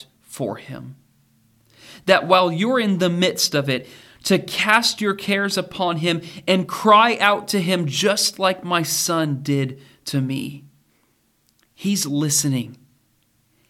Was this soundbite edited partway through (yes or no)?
no